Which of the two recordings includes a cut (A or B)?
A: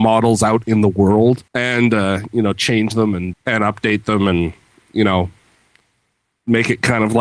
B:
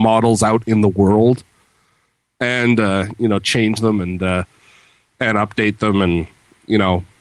A